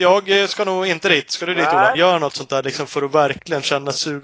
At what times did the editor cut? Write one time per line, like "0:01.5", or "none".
0:01.9